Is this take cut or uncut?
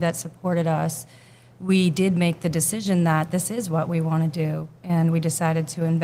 uncut